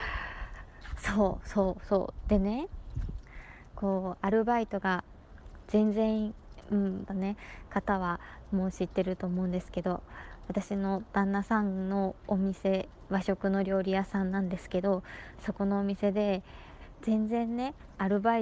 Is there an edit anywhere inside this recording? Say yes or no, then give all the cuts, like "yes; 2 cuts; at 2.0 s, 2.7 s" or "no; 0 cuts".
yes; 1 cut; at 7.1 s